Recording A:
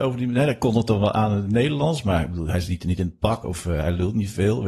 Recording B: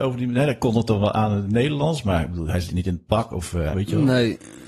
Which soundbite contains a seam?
B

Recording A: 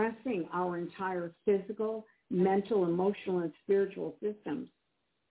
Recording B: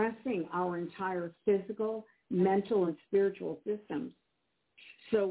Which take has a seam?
B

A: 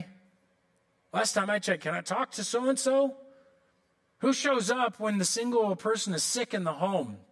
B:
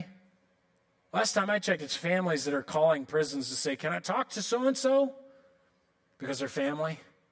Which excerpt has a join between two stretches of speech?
A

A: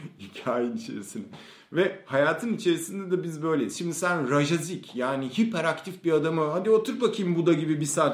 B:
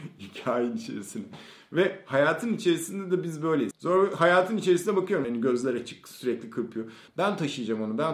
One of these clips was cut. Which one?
B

